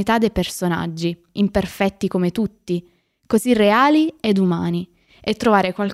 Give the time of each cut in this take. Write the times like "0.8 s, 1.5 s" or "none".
1.3 s